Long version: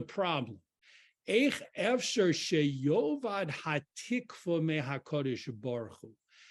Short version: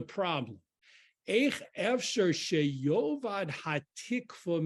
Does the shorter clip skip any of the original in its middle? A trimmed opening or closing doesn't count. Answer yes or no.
no